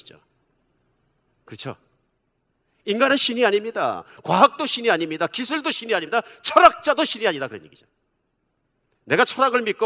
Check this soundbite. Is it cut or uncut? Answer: uncut